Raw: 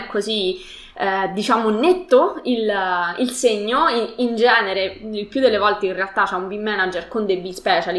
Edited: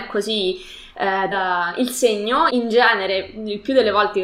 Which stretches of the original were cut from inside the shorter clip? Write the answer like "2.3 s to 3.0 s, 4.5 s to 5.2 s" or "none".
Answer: 1.3 s to 2.7 s, 3.9 s to 4.2 s

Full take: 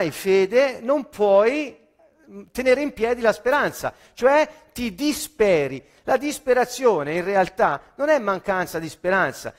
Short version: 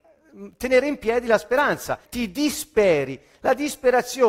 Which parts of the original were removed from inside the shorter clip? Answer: 4.0 s to 4.7 s

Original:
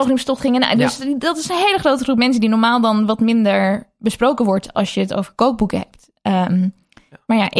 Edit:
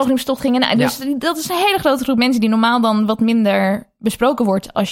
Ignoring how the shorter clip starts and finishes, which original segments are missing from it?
none

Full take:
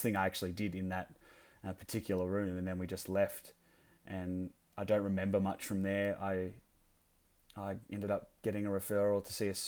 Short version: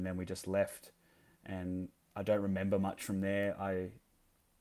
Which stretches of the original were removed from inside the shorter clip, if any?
none

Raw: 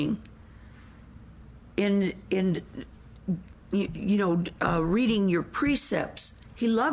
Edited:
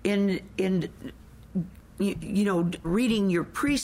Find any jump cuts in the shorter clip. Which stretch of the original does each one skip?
4.6 s to 4.8 s

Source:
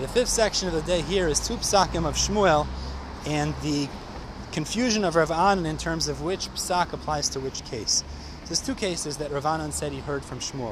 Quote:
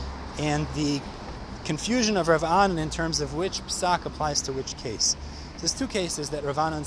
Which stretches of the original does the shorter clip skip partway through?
none

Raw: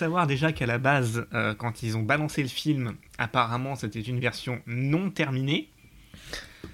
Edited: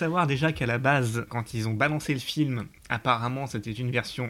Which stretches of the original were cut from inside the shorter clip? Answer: 1.3 s to 1.6 s

